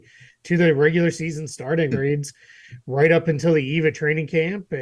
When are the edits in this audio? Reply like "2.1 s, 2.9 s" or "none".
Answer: 1.9 s